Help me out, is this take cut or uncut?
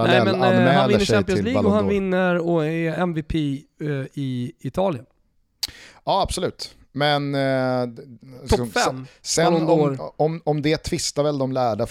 uncut